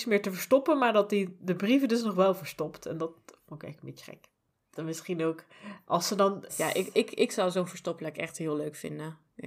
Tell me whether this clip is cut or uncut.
cut